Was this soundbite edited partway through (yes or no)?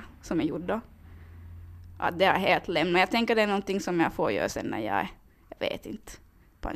no